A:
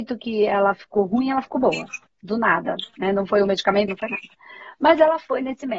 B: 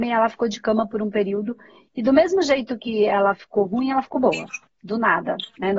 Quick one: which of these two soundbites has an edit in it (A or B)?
A